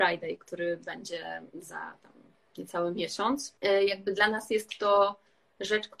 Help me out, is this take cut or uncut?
cut